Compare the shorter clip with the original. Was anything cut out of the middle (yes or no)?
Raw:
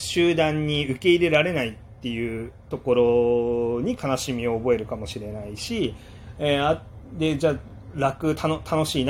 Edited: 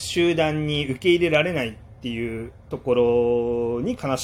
no